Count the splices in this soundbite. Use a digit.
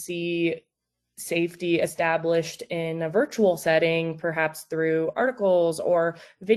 0